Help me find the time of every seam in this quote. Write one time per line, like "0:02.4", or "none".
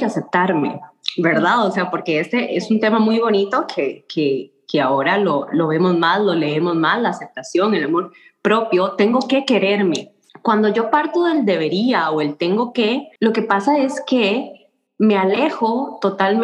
0:10.3
0:13.2